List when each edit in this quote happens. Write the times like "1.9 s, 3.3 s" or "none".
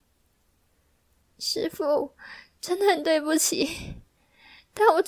none